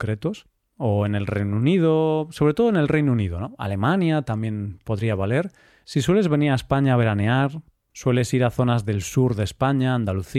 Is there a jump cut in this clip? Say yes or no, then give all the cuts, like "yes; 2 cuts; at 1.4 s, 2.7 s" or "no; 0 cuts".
no; 0 cuts